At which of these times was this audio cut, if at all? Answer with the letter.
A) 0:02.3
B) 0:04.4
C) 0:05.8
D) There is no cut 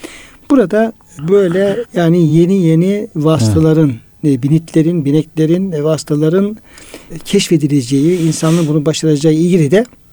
D